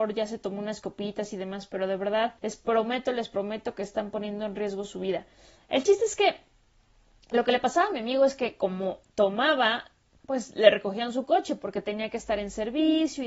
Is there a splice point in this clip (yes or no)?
yes